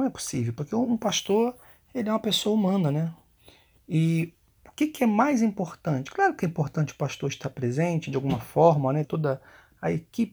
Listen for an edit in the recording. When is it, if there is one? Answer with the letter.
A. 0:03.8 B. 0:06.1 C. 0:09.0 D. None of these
C